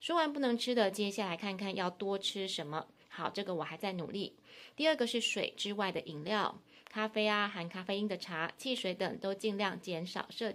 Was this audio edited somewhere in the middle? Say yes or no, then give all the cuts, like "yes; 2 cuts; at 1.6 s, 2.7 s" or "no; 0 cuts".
yes; 2 cuts; at 3.0 s, 4.7 s